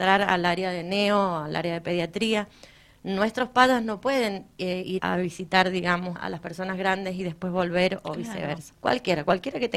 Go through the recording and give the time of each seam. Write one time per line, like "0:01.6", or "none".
0:05.0
0:06.2
0:08.7